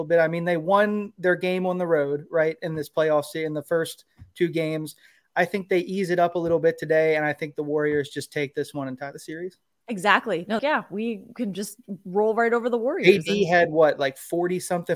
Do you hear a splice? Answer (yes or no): yes